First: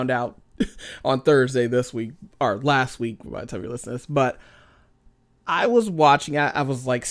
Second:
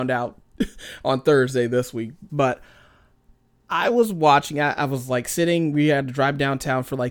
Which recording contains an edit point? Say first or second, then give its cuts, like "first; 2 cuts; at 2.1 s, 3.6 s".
second; 1 cut; at 2.3 s